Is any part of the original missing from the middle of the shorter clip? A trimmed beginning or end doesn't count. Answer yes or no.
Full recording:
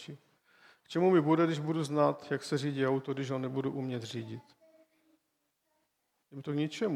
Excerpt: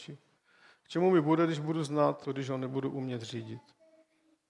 yes